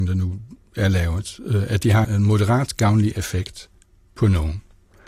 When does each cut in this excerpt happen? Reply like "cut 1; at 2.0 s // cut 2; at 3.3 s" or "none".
cut 1; at 2.0 s